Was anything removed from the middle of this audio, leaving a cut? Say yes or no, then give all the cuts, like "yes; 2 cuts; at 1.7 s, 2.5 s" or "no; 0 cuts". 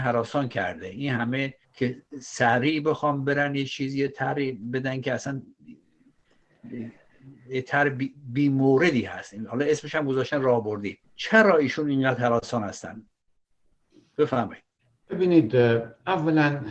yes; 2 cuts; at 1.6 s, 11.0 s